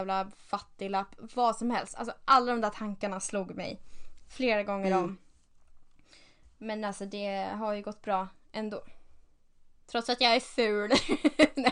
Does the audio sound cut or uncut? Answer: uncut